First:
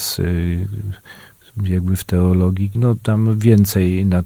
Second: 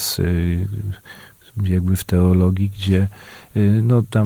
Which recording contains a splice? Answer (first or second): first